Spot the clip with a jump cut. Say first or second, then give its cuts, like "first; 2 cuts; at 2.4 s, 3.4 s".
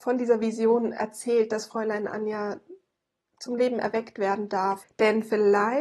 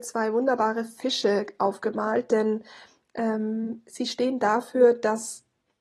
first; 1 cut; at 4.8 s